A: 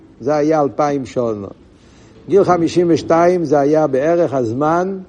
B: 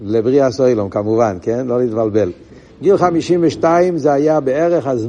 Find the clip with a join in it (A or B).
B